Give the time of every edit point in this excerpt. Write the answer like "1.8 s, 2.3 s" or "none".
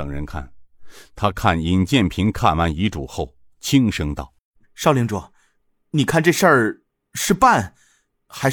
4.4 s